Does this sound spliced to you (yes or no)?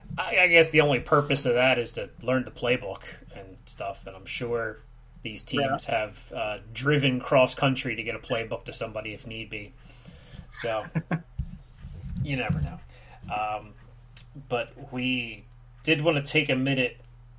no